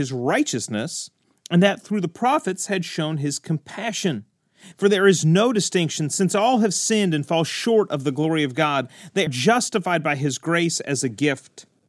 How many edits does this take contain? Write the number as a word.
two